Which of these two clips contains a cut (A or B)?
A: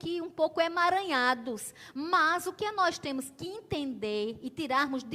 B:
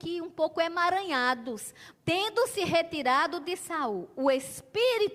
B